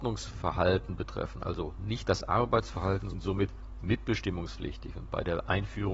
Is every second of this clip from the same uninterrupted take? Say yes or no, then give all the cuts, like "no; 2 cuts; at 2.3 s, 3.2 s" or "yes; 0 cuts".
no; 1 cut; at 3.1 s